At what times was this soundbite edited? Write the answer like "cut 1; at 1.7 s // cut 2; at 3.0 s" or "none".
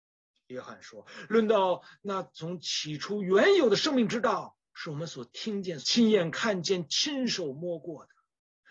cut 1; at 5.8 s